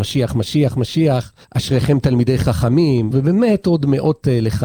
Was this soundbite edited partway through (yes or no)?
yes